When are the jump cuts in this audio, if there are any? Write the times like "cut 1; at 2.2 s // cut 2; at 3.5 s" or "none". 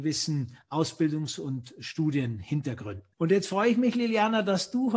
cut 1; at 3.1 s